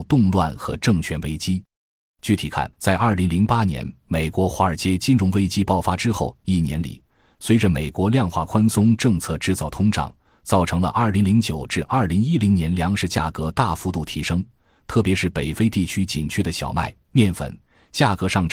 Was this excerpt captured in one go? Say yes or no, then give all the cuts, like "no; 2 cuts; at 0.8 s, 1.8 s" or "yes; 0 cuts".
no; 1 cut; at 2.7 s